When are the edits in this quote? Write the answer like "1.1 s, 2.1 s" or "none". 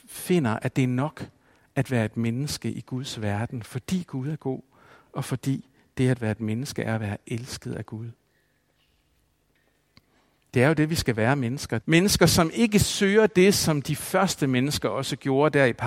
11.8 s